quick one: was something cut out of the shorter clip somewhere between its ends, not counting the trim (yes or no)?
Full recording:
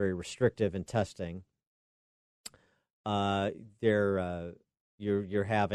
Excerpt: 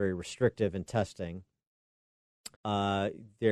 yes